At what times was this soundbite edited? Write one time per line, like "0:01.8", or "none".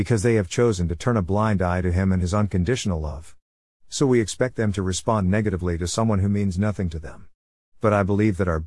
none